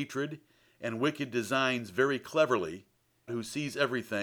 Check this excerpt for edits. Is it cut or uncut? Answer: cut